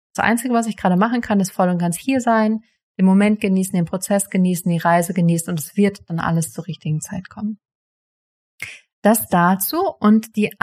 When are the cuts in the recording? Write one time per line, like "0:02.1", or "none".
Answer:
none

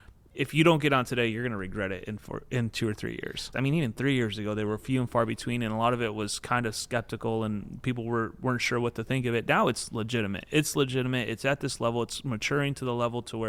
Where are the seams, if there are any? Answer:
0:03.5

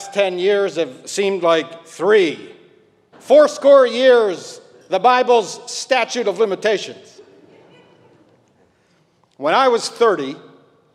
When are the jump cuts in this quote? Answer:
0:03.1

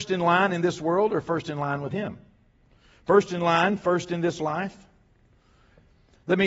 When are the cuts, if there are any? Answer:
none

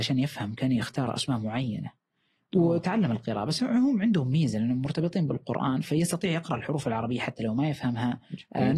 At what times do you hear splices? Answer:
none

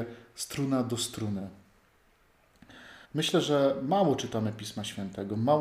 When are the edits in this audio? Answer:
0:03.0

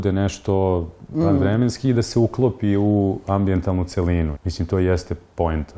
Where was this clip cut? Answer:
0:01.1
0:04.4

